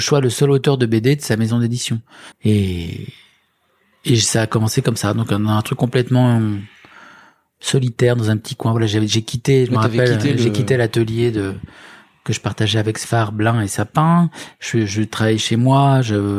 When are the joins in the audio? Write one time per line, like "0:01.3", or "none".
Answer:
0:02.3